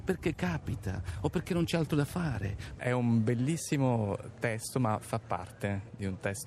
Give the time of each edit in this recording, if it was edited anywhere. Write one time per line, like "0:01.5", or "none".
0:02.8